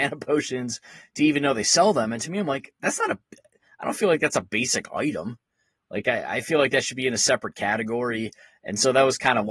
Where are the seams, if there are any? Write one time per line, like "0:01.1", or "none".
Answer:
none